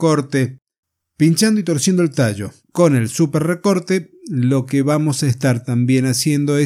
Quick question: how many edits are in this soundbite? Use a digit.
1